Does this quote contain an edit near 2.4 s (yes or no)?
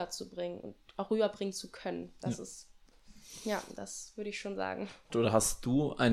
no